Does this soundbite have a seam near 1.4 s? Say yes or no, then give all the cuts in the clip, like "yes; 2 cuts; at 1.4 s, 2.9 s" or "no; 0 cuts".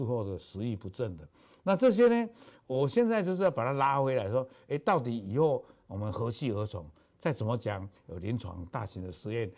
no; 1 cut; at 7.9 s